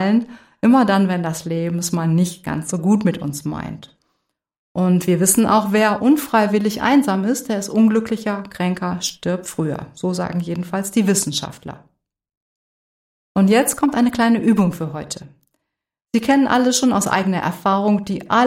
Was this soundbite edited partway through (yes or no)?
no